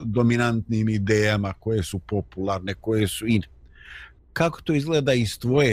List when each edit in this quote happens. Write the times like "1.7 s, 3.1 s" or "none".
4.2 s